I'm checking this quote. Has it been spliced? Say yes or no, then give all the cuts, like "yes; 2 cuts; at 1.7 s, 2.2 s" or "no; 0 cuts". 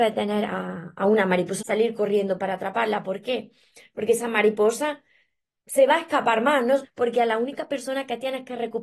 yes; 2 cuts; at 1.6 s, 6.8 s